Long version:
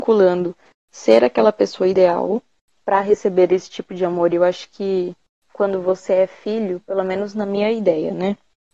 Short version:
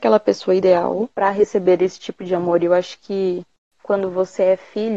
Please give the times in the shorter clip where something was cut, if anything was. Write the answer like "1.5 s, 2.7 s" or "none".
1.1 s